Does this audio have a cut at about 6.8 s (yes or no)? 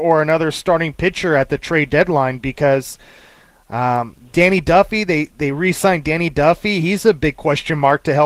no